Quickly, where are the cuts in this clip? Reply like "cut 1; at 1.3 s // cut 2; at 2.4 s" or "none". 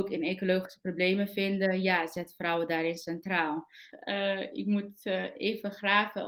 cut 1; at 3.9 s